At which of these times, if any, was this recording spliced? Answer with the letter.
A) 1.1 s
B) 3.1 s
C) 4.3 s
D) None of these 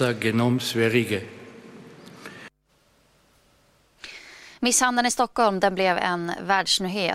D